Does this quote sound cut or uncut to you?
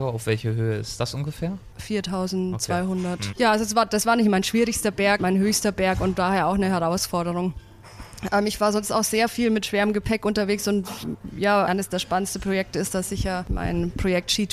cut